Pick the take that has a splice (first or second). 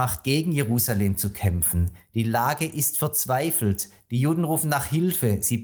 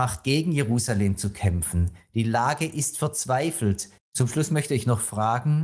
second